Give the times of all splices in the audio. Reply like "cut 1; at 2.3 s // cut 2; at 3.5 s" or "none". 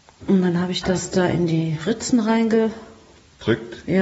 none